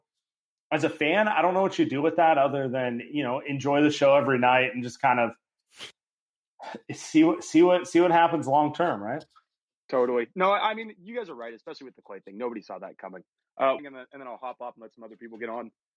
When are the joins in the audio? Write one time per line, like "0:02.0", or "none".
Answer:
0:13.8